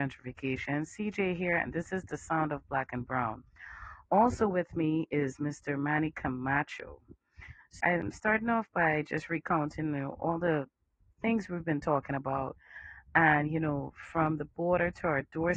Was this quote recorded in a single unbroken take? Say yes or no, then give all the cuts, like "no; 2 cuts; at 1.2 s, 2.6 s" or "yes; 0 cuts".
no; 1 cut; at 7.8 s